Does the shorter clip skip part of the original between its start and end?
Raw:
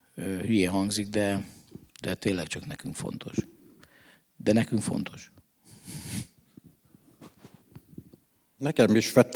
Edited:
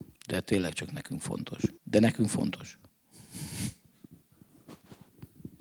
yes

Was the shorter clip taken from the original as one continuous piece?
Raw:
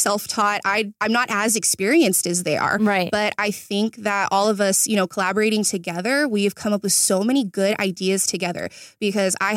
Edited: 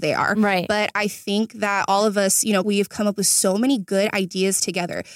no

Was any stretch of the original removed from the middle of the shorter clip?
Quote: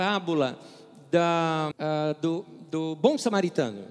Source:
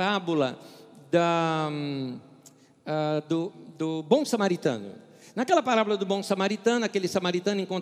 yes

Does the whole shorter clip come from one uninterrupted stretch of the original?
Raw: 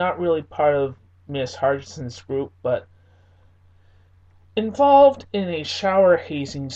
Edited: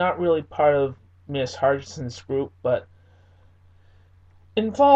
yes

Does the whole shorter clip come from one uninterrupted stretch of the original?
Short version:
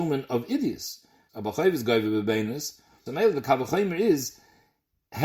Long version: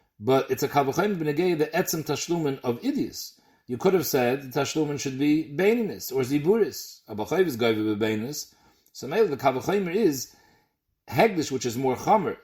no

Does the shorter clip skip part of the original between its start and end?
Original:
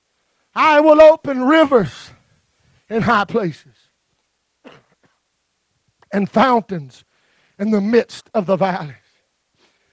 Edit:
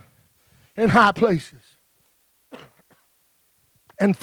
no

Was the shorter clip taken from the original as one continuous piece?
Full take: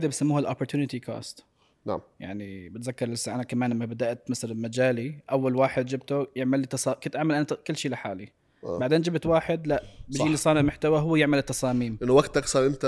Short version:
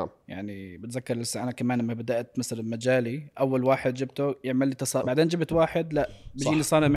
no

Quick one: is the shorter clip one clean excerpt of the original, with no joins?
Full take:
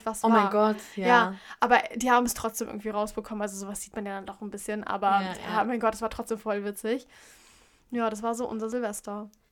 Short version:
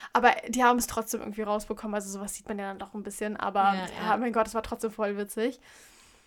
yes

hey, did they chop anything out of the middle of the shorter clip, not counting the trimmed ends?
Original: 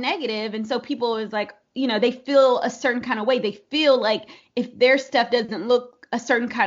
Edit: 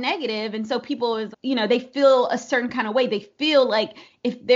yes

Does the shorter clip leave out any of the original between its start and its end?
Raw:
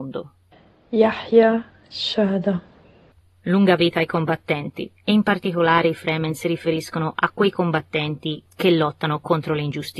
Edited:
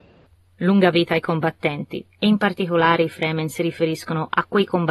no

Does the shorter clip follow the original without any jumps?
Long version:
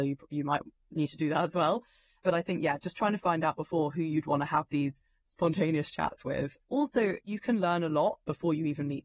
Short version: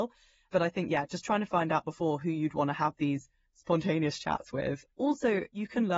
yes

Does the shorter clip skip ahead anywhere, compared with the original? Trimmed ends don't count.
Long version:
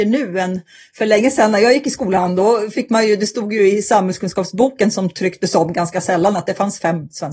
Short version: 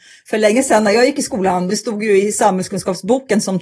yes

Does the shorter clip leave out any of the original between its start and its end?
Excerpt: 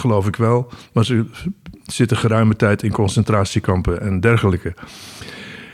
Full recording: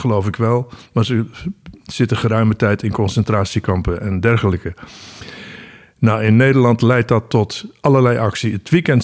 no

